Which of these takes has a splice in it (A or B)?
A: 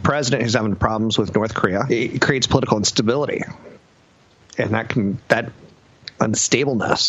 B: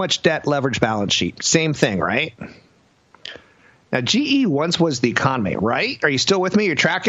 A